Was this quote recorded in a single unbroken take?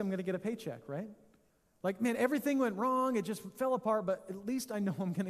yes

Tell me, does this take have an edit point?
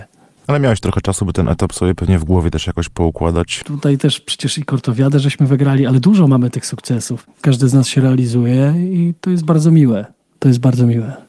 yes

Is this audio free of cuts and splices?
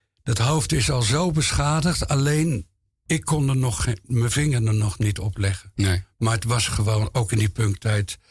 yes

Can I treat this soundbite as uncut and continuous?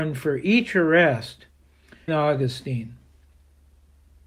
no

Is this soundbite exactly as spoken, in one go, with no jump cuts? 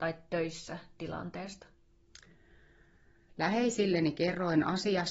no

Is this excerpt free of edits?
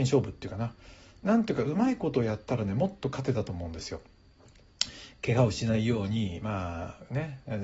yes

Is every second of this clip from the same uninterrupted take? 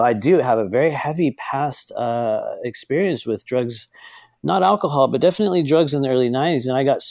yes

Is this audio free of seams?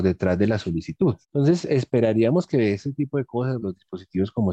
no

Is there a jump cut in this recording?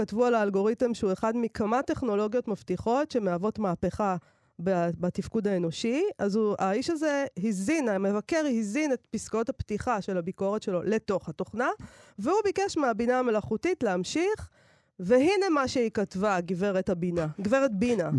no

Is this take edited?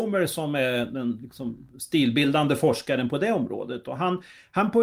no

